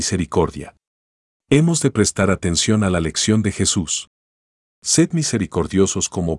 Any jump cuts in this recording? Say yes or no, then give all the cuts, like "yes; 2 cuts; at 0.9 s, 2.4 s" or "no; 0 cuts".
yes; 1 cut; at 1.4 s